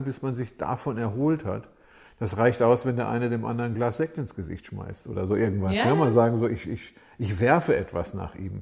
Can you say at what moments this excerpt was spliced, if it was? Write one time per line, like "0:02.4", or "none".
0:06.6